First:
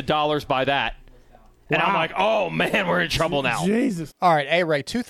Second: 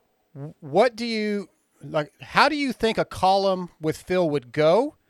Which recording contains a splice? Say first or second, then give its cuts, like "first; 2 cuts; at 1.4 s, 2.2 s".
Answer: first; 1 cut; at 4.1 s